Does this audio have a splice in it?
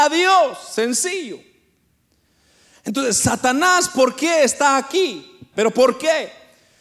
yes; 1 cut; at 5.5 s

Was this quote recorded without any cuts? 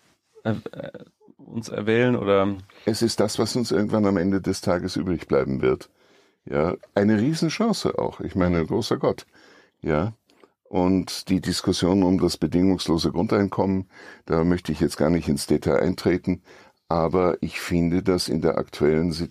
yes; 0 cuts

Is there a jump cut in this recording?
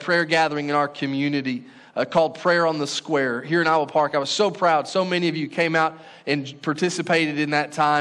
no; 0 cuts

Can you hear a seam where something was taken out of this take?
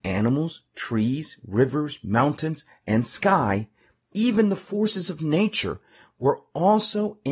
no; 0 cuts

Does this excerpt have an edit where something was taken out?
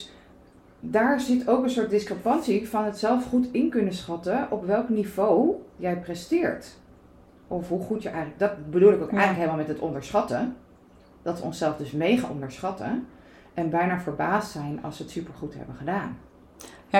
no; 0 cuts

